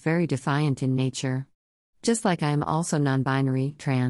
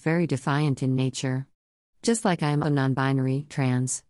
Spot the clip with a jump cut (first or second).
second